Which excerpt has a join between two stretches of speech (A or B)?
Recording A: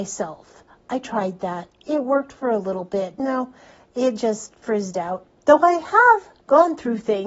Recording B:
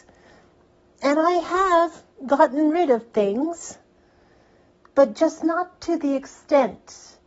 A